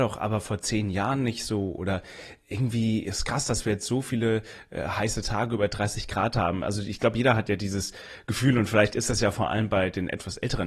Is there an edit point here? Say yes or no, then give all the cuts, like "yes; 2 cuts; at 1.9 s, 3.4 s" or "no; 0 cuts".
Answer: no; 0 cuts